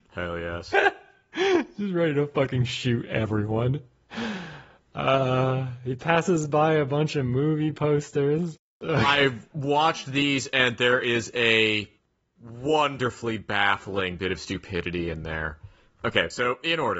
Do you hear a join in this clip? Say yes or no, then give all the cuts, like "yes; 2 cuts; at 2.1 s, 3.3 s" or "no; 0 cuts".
no; 0 cuts